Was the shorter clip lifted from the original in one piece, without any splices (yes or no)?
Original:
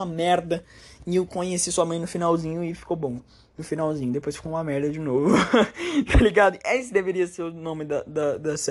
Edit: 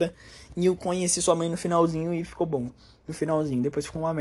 yes